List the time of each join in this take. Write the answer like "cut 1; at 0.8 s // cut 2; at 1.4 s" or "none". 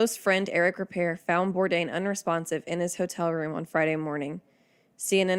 none